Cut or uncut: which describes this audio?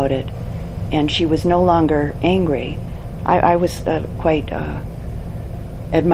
cut